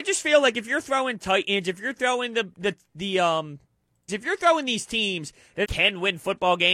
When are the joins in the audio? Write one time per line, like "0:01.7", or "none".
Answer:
0:04.1
0:05.6

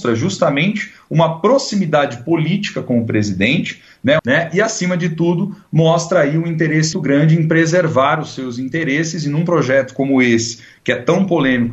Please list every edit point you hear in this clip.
0:04.2
0:06.9

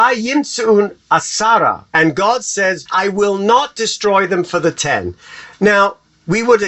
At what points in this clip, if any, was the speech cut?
0:02.9

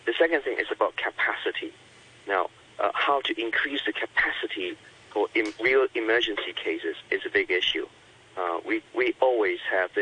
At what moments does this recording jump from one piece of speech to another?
0:08.9

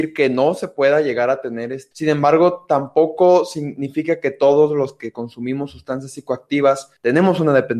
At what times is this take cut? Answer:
0:01.9

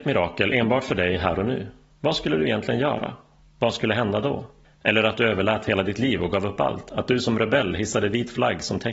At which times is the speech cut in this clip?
0:04.6

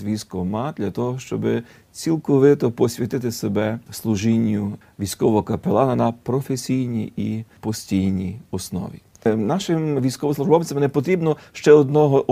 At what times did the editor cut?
0:09.1

